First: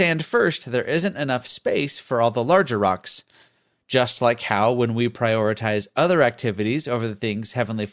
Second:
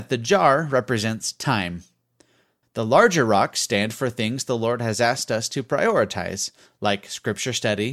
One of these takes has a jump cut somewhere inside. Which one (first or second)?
second